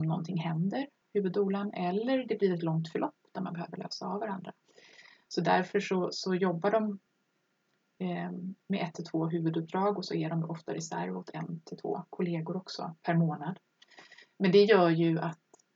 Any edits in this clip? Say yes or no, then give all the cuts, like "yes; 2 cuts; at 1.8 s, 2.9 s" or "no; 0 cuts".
no; 0 cuts